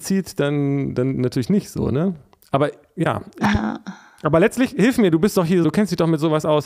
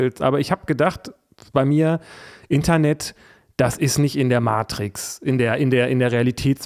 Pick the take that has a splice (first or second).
first